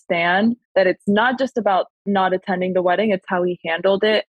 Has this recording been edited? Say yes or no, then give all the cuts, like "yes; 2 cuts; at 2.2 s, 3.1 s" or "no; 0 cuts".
no; 0 cuts